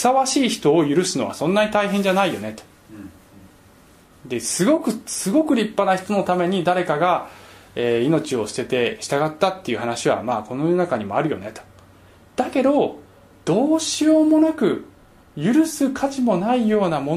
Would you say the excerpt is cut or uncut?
uncut